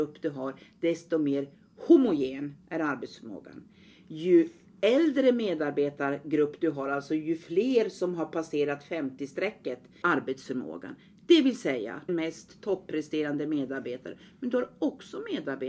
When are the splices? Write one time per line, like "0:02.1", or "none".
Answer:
0:10.0
0:12.1